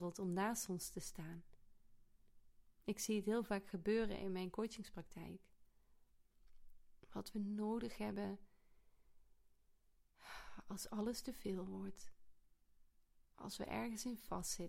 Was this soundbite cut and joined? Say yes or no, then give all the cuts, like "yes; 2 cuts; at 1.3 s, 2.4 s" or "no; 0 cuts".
no; 0 cuts